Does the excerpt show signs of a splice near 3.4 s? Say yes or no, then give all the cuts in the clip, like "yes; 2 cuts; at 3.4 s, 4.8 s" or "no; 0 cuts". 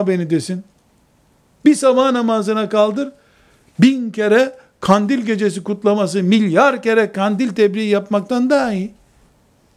no; 0 cuts